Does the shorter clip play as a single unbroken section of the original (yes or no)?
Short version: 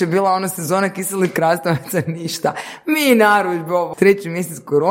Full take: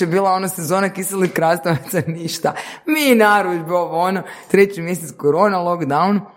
no